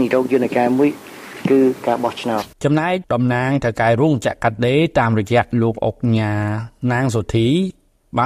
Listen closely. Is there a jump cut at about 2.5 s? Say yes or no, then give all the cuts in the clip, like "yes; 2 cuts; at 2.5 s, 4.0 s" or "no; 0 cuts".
yes; 1 cut; at 2.5 s